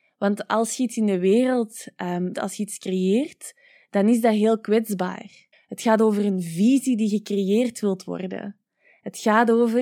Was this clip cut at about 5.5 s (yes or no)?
yes